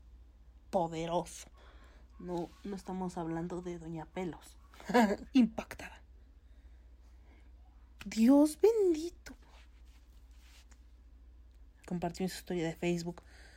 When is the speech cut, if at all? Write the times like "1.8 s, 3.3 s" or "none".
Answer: 5.3 s, 8.0 s, 11.8 s